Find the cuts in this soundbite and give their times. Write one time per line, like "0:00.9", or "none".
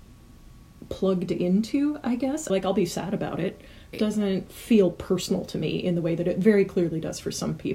0:02.5
0:03.9